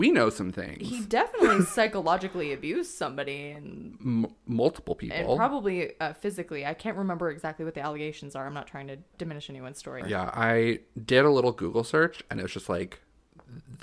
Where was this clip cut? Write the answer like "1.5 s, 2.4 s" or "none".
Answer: 10.0 s